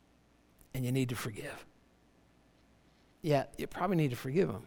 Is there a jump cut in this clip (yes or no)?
yes